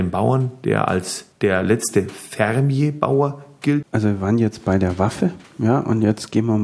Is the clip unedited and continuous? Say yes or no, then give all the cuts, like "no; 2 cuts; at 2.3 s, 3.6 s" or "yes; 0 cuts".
no; 2 cuts; at 1.3 s, 3.8 s